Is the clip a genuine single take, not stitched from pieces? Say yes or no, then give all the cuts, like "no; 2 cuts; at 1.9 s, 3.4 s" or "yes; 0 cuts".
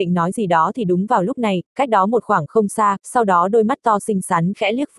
no; 1 cut; at 3.0 s